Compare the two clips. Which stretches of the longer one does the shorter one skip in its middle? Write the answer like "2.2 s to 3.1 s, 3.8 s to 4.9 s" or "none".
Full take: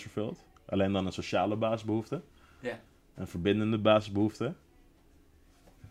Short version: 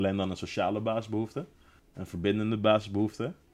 2.5 s to 3.0 s